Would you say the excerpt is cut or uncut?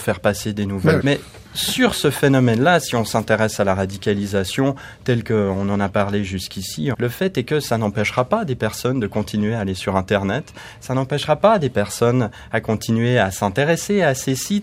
cut